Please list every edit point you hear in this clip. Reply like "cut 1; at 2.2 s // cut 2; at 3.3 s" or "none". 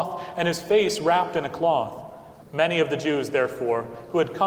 cut 1; at 2.4 s